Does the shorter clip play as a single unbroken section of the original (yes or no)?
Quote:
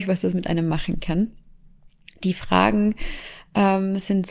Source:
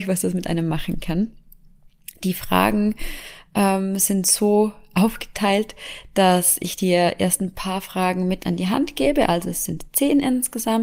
yes